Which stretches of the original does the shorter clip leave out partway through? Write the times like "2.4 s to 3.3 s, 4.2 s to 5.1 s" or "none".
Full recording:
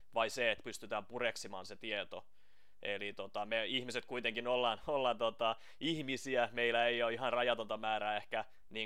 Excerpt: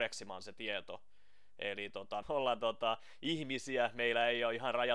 3.5 s to 4.8 s